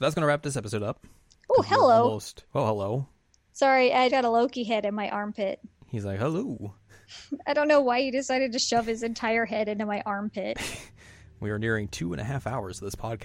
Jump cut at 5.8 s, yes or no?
no